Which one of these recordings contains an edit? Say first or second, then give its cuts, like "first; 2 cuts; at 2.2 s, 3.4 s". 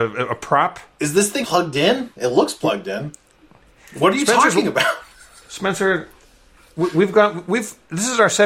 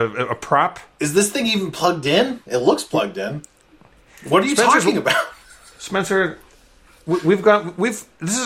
first; 1 cut; at 1.4 s